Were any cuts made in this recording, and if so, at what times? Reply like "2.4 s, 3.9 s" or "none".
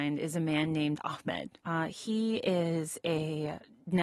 1.6 s